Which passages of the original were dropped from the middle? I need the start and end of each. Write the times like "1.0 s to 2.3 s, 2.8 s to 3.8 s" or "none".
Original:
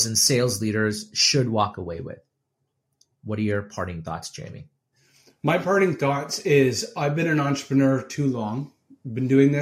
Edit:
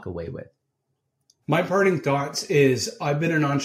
3.1 s to 5.4 s